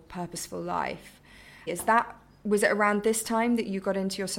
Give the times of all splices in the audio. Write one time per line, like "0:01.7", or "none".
0:01.7